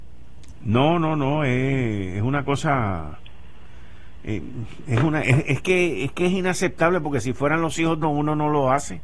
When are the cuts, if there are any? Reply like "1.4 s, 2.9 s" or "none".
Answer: 8.0 s